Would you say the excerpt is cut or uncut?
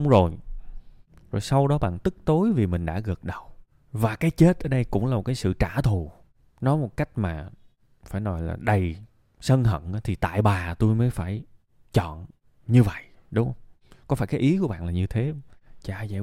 uncut